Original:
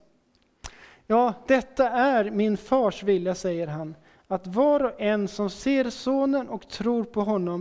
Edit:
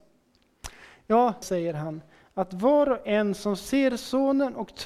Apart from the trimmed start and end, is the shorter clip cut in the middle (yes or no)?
yes